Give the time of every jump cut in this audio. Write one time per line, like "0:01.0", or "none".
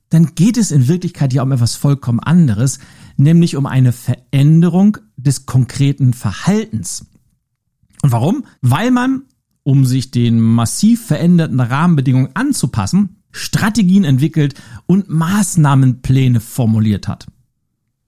0:08.6
0:13.3